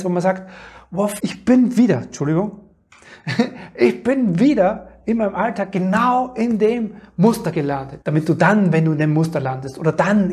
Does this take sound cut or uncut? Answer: cut